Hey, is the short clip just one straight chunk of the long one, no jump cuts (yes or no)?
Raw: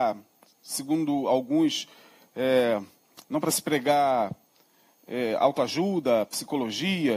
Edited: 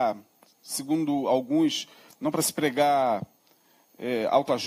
no